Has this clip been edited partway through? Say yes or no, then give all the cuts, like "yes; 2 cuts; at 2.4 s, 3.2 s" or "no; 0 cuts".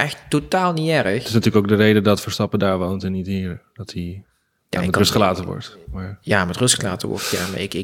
no; 0 cuts